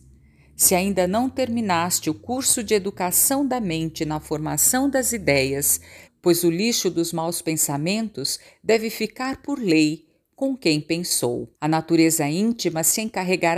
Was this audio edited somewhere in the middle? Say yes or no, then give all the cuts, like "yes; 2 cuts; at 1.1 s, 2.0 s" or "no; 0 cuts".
yes; 2 cuts; at 6.1 s, 11.5 s